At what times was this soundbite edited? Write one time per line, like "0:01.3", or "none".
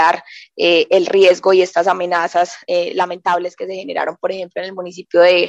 none